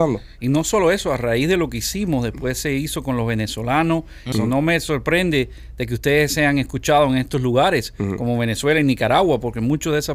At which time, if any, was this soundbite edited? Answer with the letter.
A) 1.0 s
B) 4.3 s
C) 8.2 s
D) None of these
B